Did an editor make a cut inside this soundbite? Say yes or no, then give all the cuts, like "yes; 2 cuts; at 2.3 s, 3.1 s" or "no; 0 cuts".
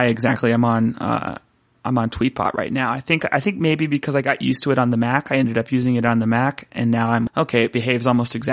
yes; 1 cut; at 7.3 s